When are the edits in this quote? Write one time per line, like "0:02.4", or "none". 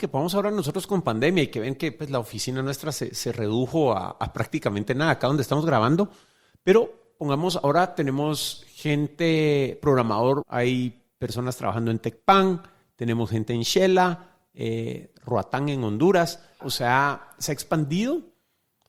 0:10.4
0:16.6